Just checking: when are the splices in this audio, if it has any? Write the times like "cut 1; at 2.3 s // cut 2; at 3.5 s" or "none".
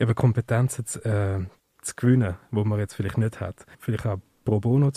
cut 1; at 1.6 s // cut 2; at 3.7 s